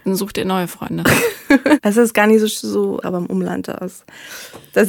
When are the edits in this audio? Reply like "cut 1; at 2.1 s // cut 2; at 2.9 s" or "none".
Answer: cut 1; at 1.8 s // cut 2; at 3.0 s